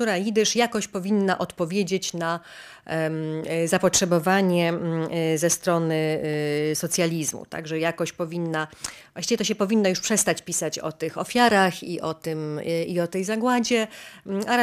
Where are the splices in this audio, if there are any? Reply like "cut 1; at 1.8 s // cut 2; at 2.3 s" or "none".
none